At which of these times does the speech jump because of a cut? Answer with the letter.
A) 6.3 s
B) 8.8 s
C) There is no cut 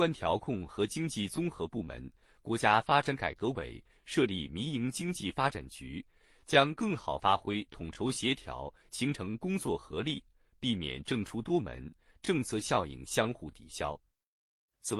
B